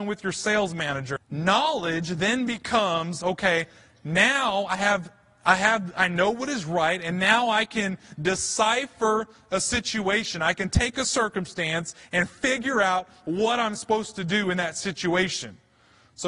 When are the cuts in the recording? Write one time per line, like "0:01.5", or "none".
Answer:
0:01.2